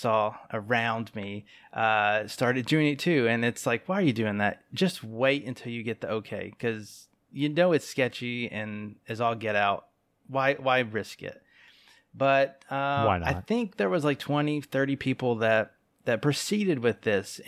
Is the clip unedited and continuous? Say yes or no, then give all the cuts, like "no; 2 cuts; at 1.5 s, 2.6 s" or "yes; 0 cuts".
yes; 0 cuts